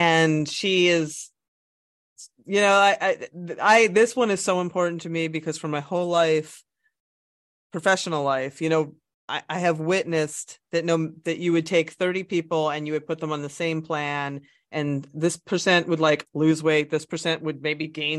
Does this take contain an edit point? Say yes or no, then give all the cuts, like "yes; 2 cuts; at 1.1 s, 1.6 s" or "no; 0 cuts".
no; 0 cuts